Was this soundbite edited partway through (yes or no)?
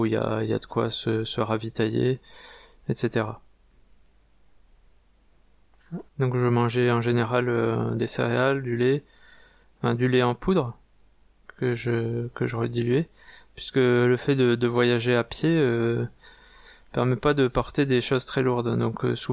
yes